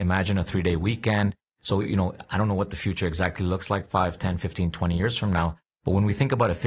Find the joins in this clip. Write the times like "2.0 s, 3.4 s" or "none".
none